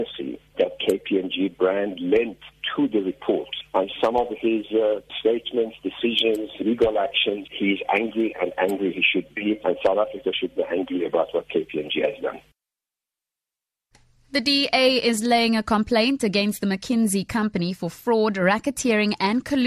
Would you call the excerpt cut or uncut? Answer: uncut